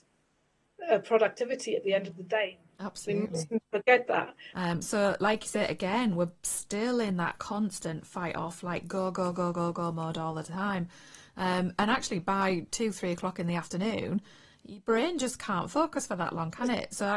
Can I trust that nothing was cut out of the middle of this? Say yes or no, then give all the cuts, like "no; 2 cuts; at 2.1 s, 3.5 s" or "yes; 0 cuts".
no; 1 cut; at 4.5 s